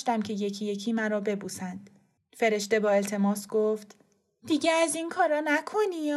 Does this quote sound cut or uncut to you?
cut